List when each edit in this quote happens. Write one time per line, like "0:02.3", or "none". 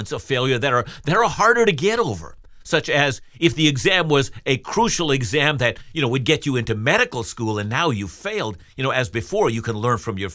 none